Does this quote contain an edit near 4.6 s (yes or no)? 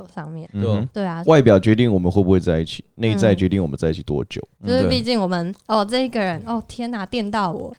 yes